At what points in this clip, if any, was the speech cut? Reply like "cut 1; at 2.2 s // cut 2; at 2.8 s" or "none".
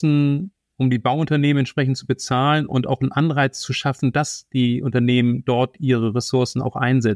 none